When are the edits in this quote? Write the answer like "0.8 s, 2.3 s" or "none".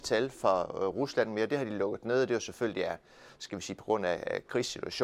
none

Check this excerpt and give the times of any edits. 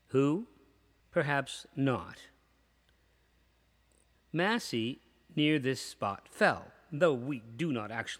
1.0 s, 4.1 s

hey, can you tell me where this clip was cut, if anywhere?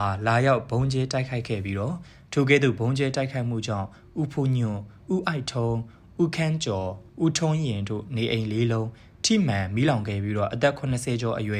7.1 s

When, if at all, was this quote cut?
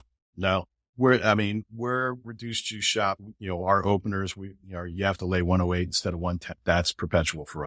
none

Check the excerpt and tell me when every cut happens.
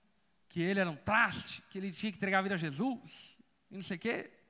none

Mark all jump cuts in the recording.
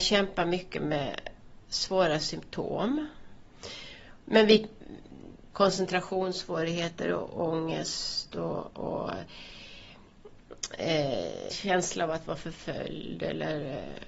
5.5 s, 11.5 s

